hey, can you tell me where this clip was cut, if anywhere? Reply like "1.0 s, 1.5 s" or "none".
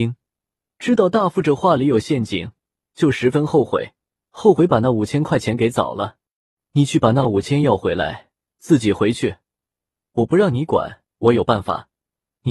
6.6 s